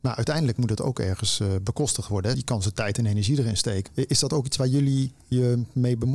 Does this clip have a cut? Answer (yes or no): yes